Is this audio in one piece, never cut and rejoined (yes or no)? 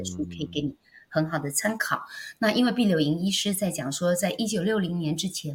yes